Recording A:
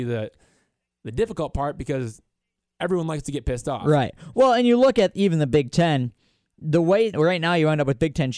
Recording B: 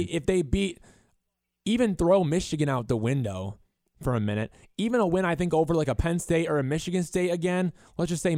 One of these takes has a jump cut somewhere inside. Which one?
A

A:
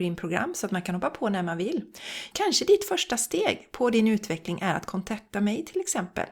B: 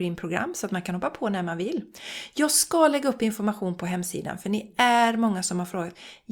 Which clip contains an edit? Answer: A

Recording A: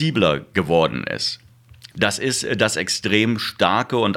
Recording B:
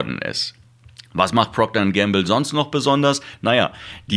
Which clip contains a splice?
A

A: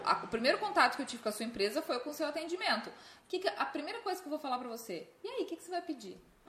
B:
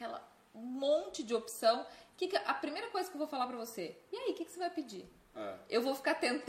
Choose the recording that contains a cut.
A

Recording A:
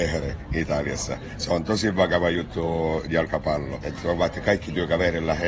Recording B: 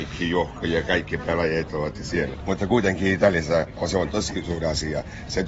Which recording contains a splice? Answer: A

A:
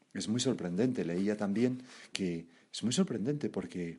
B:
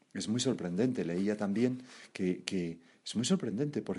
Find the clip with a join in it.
A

